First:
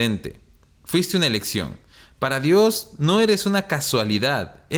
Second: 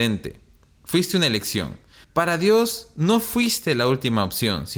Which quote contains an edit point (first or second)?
second